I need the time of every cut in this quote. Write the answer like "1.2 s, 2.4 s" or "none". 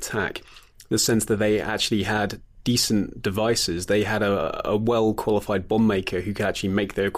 none